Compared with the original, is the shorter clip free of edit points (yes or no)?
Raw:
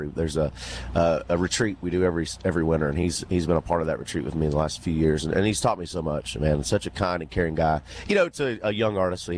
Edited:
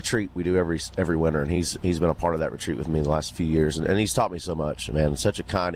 yes